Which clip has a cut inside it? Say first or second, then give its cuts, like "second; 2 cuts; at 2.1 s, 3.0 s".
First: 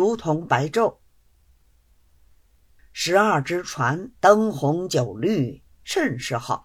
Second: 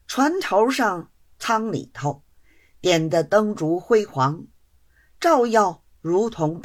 first; 2 cuts; at 2.8 s, 4.2 s